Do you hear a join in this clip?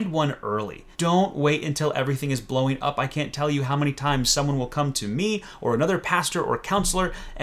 yes; 1 cut; at 0.9 s

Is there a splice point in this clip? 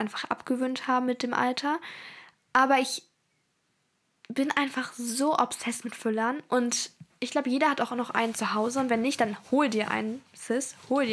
no; 0 cuts

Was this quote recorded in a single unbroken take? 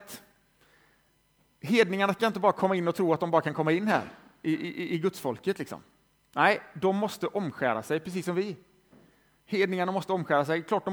yes; 0 cuts

